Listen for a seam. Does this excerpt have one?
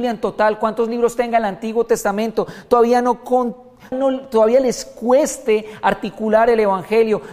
yes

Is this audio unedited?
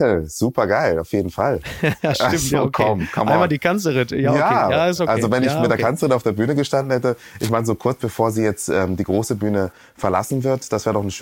yes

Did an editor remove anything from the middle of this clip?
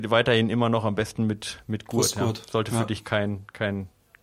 no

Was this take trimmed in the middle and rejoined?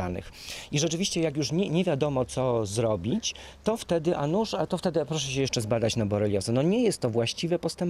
no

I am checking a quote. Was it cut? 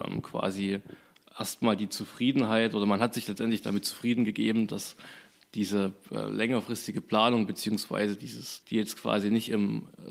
yes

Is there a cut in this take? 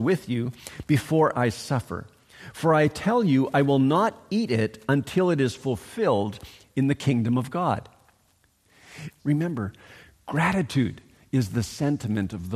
yes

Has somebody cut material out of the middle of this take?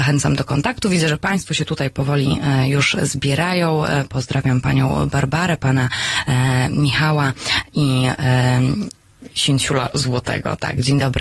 no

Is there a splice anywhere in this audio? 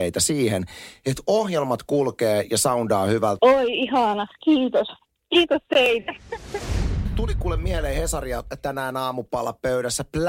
yes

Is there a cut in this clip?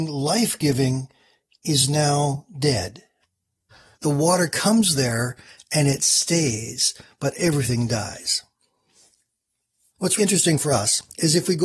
yes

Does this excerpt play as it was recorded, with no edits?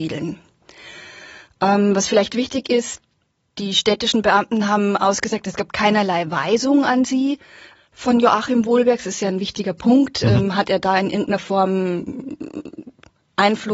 yes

